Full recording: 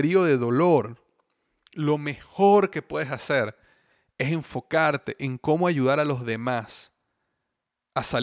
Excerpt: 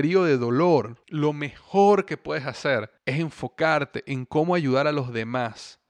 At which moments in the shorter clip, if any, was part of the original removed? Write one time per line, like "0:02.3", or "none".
0:01.0
0:03.0